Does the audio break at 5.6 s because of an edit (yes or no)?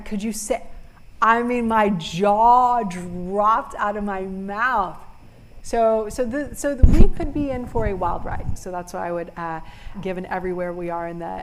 yes